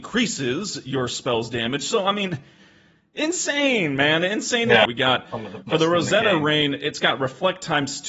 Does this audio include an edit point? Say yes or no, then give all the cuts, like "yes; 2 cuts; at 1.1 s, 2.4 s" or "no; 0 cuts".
yes; 1 cut; at 4.9 s